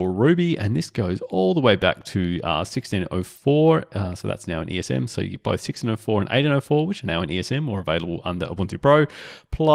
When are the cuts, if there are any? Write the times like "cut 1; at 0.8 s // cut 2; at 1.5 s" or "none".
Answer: none